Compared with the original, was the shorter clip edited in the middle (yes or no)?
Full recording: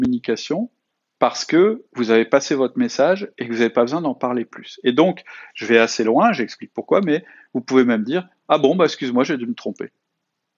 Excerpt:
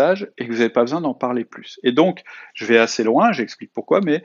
no